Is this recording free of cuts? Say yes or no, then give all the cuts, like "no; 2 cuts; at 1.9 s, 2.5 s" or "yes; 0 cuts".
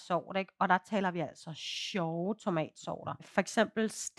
no; 1 cut; at 3.2 s